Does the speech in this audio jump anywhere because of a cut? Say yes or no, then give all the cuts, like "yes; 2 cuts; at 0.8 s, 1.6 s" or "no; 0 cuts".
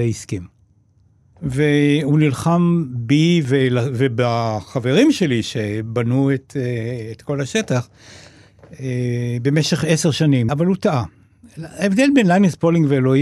yes; 2 cuts; at 1.3 s, 10.5 s